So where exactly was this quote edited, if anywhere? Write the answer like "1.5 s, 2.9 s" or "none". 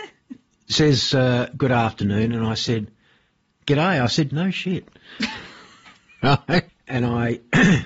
4.3 s, 6.7 s